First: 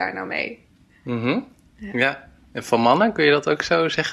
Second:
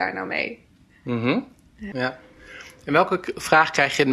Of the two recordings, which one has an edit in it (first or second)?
second